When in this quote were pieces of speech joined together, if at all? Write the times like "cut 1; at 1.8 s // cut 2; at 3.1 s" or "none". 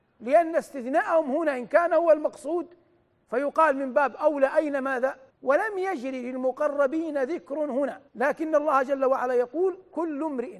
cut 1; at 5.3 s // cut 2; at 8.1 s